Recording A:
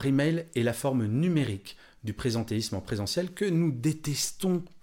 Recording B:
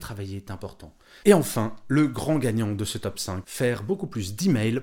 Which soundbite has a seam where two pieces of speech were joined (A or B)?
B